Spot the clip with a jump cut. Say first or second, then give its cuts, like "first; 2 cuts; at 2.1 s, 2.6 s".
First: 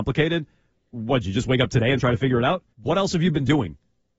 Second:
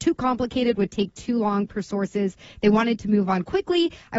first; 1 cut; at 2.7 s